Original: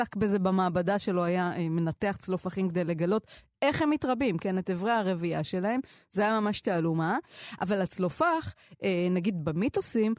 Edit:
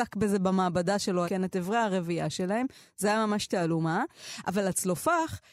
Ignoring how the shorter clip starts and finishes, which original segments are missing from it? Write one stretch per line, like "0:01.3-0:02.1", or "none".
0:01.2-0:04.4